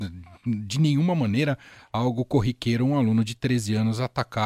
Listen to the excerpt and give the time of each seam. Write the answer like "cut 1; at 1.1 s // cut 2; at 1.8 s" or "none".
none